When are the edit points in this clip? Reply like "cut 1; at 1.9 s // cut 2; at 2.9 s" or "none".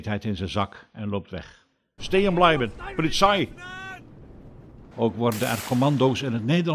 cut 1; at 2.0 s // cut 2; at 4.9 s